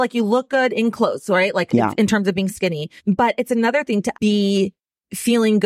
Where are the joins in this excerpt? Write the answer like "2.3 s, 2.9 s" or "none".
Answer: 3.0 s, 4.1 s